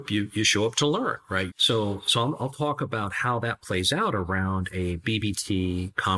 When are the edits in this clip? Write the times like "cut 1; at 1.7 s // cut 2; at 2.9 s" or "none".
cut 1; at 1.5 s